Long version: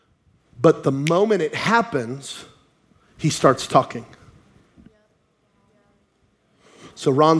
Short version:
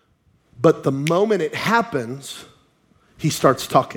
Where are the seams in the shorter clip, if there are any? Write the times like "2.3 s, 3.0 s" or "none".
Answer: none